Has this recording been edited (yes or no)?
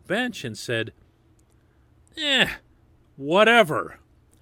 no